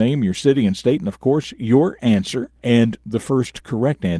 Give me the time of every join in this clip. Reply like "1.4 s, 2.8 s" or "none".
2.6 s